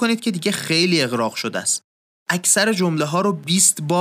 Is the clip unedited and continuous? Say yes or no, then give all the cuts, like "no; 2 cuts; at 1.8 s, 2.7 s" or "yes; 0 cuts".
yes; 0 cuts